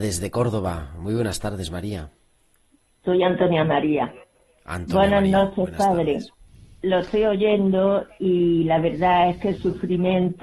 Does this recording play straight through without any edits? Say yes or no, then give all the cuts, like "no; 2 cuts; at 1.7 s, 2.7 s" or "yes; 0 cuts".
yes; 0 cuts